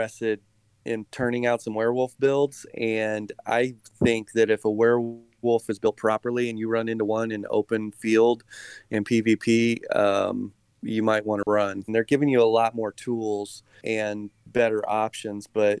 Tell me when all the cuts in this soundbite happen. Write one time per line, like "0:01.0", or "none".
0:11.9
0:13.8